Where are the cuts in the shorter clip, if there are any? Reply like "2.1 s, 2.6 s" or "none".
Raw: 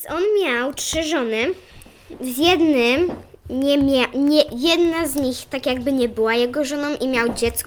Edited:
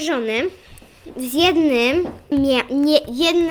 2.3 s